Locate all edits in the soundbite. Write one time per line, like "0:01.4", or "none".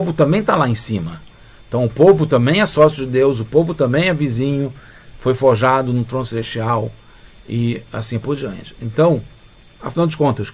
none